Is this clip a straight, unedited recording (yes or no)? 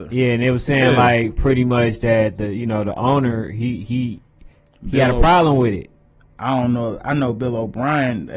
yes